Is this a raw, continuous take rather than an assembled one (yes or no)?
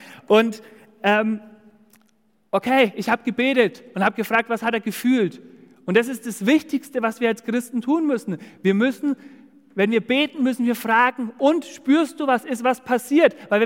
yes